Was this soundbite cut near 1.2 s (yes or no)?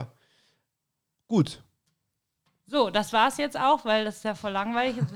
no